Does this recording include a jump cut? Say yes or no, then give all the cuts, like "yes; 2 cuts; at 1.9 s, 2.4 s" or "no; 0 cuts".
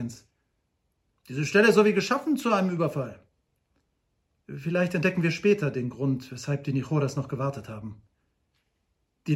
yes; 2 cuts; at 1.1 s, 4.4 s